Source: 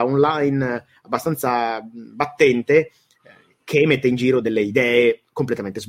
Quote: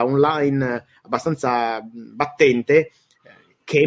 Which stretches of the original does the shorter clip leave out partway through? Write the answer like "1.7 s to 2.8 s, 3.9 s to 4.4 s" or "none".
none